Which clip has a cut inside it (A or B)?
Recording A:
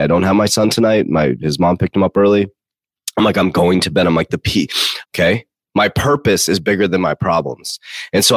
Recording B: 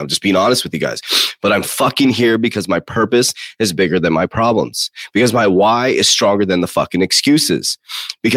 A